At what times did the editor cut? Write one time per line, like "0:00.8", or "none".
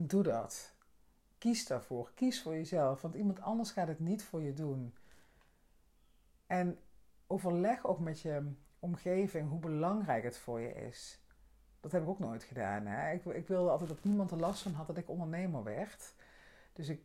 none